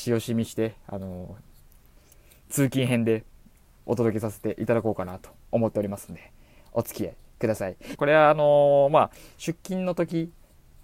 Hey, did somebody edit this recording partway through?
yes; 1 cut; at 8.0 s

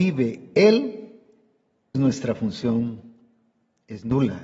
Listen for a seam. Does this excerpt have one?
yes; 1 cut; at 1.9 s

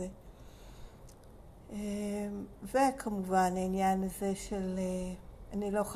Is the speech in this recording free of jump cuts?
yes; 0 cuts

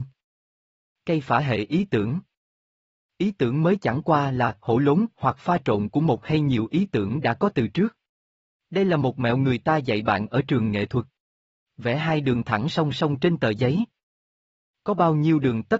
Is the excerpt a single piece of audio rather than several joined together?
yes; 0 cuts

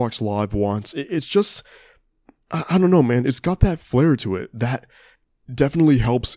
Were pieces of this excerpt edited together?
no; 0 cuts

